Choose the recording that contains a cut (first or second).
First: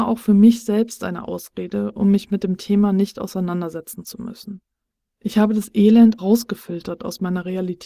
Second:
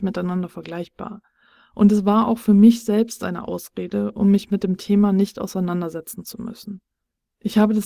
first